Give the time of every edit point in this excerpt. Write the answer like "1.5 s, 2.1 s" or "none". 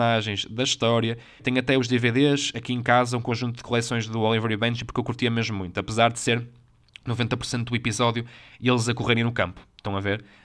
1.4 s